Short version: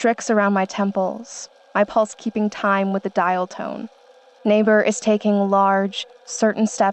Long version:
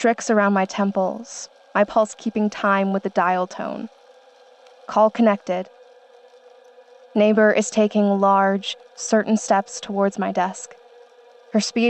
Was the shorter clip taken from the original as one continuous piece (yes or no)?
no